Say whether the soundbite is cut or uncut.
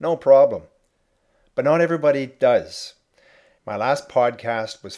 cut